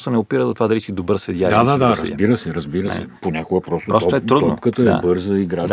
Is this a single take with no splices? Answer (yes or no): yes